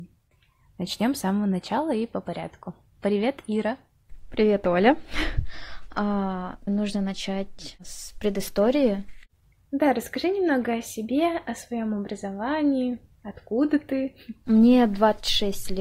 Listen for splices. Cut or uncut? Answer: cut